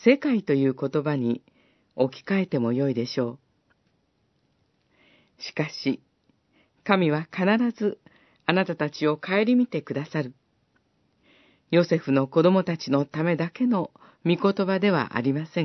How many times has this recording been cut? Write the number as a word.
zero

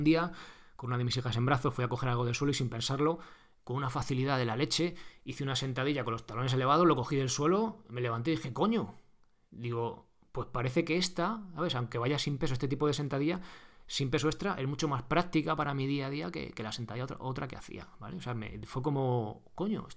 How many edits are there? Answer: zero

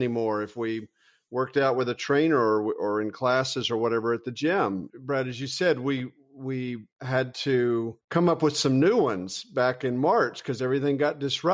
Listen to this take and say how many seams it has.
two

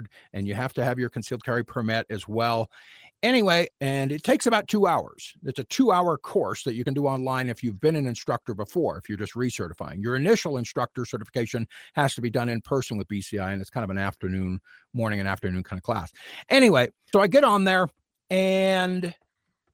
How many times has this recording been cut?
two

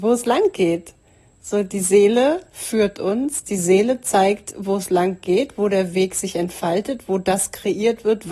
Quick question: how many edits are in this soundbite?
zero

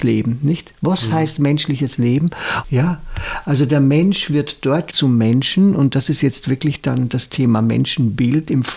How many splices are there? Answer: two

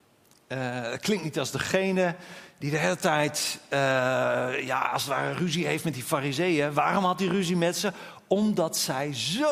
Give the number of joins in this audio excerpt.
zero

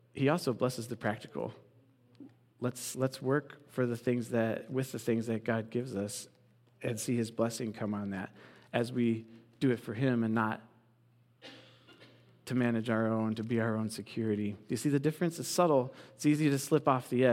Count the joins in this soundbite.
zero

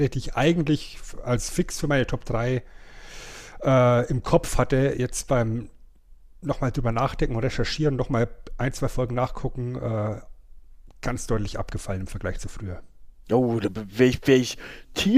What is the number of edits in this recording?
zero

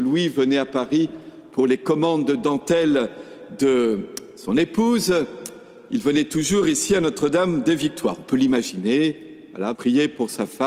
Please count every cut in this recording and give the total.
one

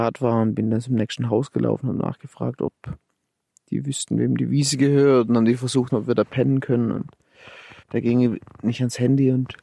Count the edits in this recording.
two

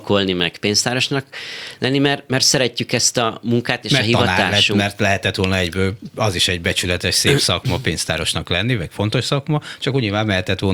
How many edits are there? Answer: zero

